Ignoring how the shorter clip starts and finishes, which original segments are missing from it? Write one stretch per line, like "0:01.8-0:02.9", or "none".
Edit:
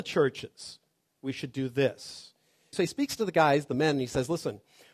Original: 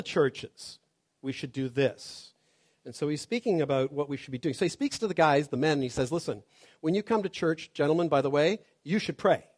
0:02.7-0:04.6